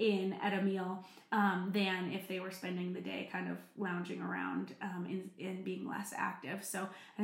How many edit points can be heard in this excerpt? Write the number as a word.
zero